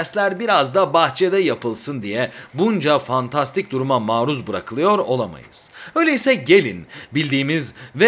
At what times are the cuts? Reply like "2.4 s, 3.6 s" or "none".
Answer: none